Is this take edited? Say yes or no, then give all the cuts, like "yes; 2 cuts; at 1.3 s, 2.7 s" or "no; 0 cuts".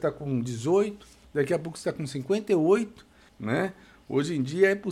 yes; 2 cuts; at 1.2 s, 3.3 s